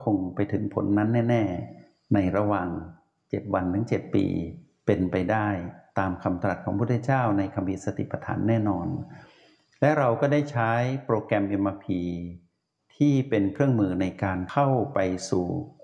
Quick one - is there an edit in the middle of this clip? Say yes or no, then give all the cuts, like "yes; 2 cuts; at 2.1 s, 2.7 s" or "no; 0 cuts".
no; 0 cuts